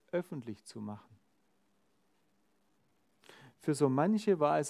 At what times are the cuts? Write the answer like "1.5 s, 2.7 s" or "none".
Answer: none